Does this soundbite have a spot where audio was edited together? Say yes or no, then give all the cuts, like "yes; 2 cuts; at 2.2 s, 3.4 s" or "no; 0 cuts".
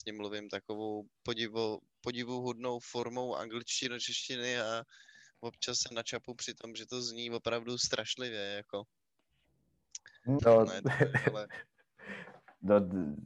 yes; 1 cut; at 10.4 s